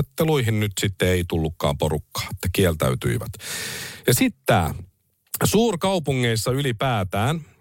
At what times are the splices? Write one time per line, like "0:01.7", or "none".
none